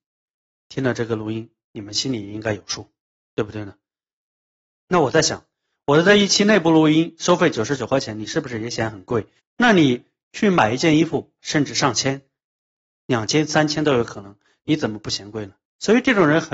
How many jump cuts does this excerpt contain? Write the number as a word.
three